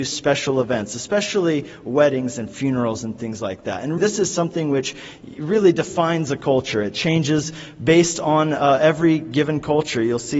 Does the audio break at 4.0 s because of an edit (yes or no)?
yes